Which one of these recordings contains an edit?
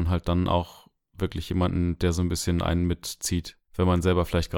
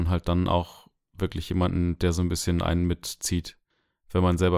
first; 1 cut; at 3.6 s

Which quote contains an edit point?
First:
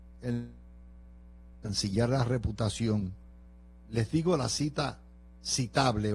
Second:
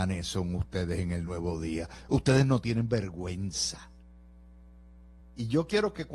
second; 1 cut; at 5.2 s

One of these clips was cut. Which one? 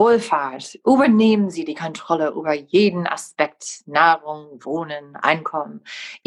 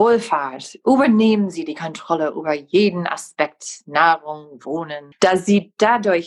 second; 1 cut; at 5.1 s

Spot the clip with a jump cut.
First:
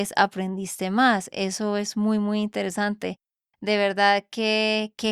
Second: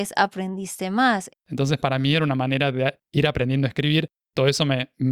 second; 1 cut; at 1.3 s

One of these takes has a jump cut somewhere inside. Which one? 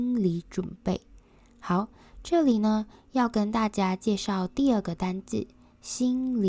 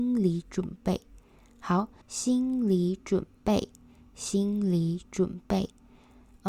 second; 1 cut; at 2.0 s

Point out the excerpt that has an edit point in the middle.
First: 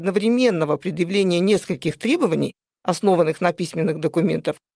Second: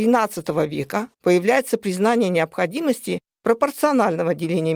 second; 1 cut; at 1.1 s

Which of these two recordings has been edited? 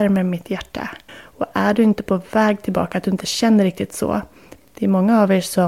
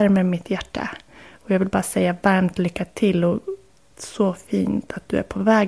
first; 2 cuts; at 1.1 s, 4.6 s

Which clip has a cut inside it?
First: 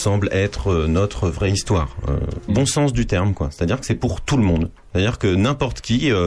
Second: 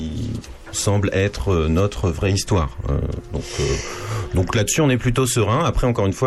first; 1 cut; at 2.5 s

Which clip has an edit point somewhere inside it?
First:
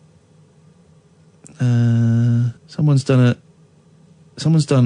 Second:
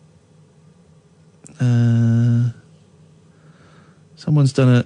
first; 1 cut; at 2.6 s

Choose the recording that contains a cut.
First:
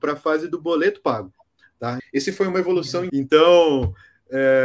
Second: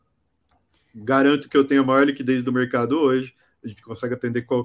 first; 2 cuts; at 2.0 s, 3.1 s

